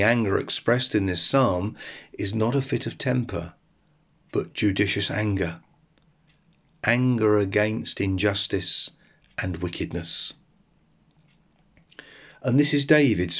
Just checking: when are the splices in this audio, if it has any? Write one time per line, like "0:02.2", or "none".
none